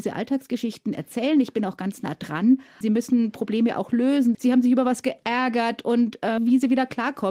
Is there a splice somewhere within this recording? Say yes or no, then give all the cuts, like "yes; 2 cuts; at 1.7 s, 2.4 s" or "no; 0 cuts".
yes; 3 cuts; at 2.8 s, 4.3 s, 6.4 s